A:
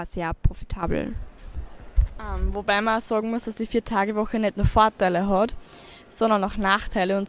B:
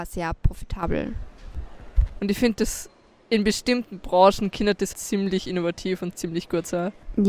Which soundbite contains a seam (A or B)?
B